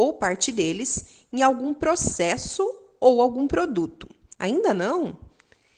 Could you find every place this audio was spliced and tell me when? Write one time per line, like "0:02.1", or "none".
0:04.3

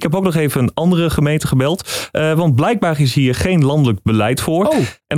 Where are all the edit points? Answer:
none

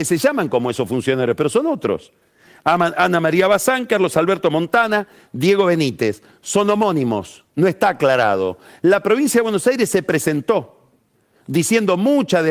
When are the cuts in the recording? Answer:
none

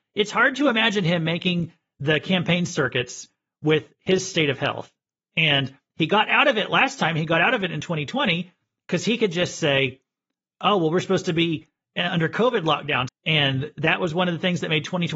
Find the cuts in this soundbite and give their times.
0:13.1

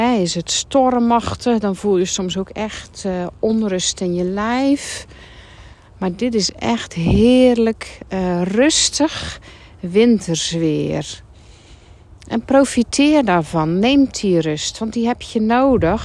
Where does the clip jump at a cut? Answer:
none

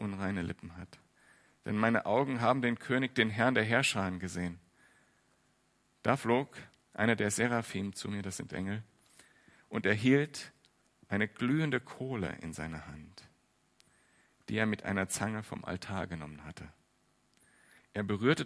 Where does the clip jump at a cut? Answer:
none

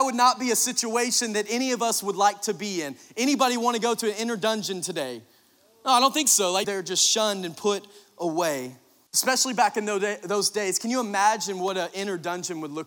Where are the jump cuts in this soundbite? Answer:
0:06.6
0:09.1

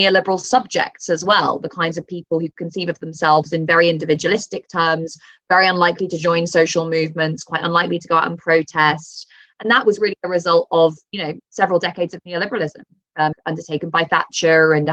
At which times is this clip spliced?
0:09.5
0:13.3

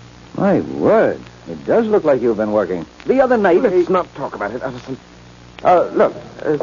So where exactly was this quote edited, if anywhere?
0:02.9
0:05.6

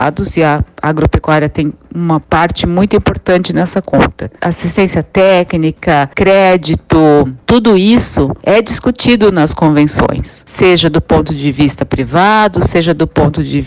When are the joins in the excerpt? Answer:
0:04.4

